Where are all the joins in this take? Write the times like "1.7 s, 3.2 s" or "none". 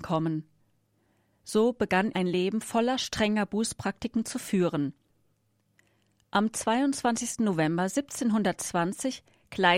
2.1 s